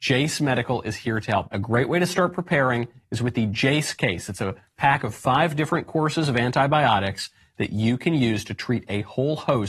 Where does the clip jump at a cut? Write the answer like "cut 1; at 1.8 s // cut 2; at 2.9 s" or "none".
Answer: cut 1; at 1.5 s

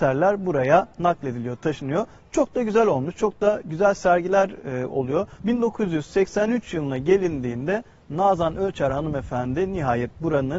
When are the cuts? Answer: cut 1; at 5.4 s

